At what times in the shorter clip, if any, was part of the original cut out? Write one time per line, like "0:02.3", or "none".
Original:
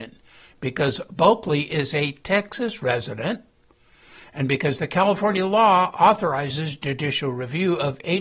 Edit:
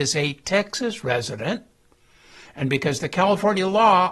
none